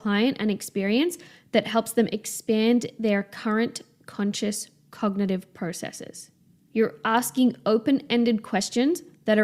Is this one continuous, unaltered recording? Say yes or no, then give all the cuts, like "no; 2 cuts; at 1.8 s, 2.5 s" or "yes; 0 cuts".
yes; 0 cuts